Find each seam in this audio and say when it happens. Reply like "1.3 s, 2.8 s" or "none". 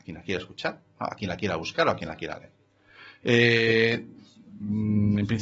none